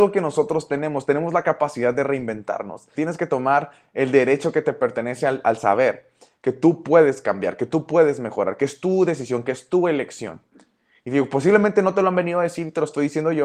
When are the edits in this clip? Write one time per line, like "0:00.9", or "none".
0:02.9